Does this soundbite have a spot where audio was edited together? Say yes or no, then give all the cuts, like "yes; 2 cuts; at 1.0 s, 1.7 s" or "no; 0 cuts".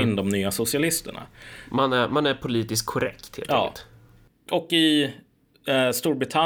no; 0 cuts